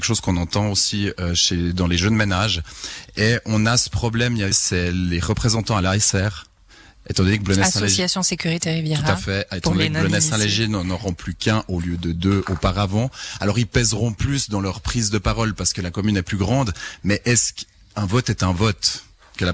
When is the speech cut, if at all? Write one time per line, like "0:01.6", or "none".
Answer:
0:04.5